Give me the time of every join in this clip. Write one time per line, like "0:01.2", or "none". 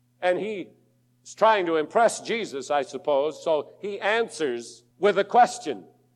0:04.9